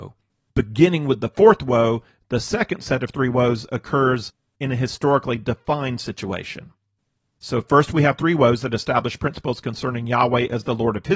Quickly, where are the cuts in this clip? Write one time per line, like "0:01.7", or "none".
none